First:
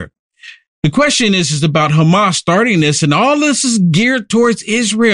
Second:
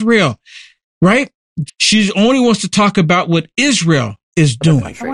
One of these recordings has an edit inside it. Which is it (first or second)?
second